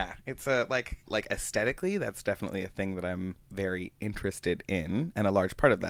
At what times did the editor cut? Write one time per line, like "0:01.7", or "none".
0:01.1
0:03.4